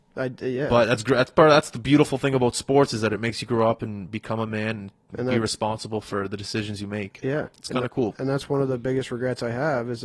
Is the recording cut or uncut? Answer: uncut